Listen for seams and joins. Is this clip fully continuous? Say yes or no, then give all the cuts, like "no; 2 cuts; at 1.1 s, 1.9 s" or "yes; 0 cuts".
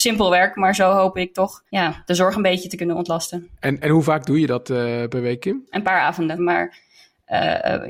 no; 2 cuts; at 1.7 s, 6.4 s